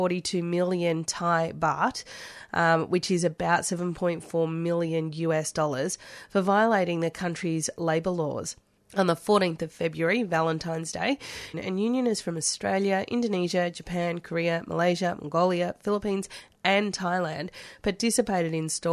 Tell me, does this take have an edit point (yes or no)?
yes